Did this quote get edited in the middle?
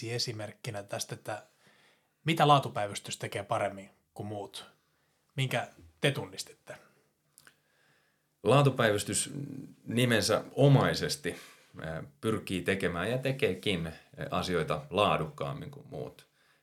no; 0 cuts

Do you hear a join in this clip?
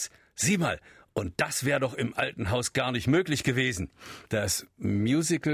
yes; 1 cut; at 4.3 s

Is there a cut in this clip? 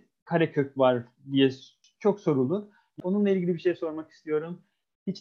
yes; 1 cut; at 3.0 s

